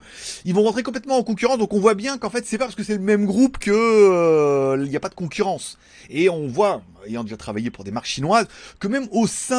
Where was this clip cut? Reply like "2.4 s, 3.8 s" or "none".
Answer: none